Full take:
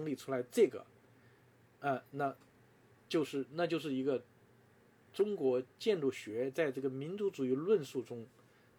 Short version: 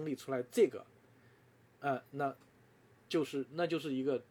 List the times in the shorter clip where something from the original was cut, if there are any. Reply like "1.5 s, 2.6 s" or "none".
none

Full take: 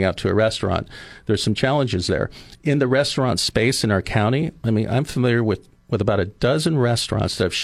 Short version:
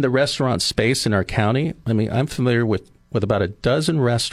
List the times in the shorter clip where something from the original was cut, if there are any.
none

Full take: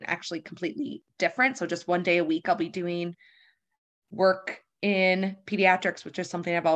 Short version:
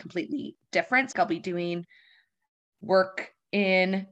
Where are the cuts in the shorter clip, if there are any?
1.1 s

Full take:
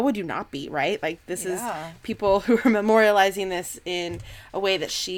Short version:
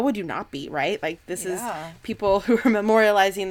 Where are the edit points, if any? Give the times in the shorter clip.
none

